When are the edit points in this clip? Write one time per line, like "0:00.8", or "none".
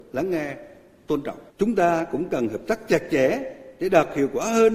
0:01.5